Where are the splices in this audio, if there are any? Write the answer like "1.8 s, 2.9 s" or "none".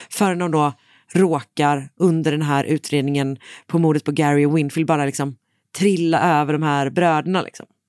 none